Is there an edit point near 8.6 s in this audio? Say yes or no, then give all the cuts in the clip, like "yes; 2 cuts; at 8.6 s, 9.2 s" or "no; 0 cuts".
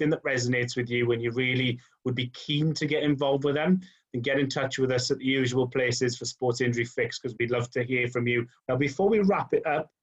yes; 1 cut; at 8.6 s